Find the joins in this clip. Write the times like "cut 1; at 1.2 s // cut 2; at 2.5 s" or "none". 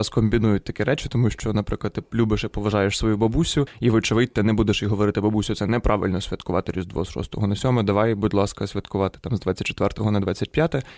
none